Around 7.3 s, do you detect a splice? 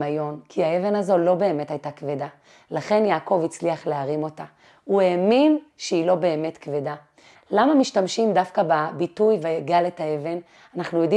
yes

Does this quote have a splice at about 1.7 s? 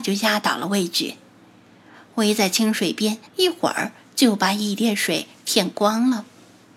no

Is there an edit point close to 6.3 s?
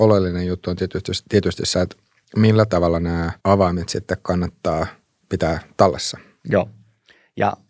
no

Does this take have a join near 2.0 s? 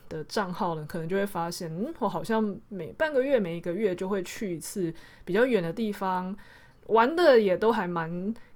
no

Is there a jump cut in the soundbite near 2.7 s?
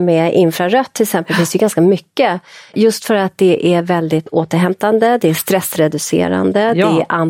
no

